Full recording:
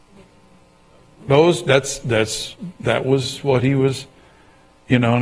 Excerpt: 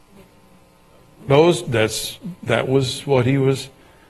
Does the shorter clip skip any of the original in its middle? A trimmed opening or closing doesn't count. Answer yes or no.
yes